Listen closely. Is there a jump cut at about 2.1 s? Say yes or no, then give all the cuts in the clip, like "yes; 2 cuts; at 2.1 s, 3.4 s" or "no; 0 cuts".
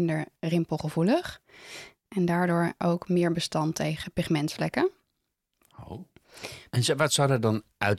yes; 2 cuts; at 2.1 s, 6.7 s